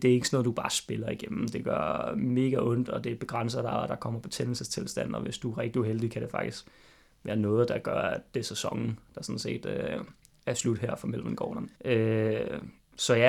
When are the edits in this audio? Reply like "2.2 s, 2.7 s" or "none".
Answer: 11.7 s